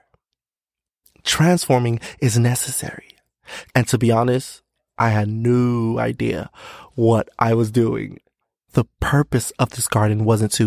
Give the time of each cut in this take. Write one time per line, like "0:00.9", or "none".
0:03.7
0:08.6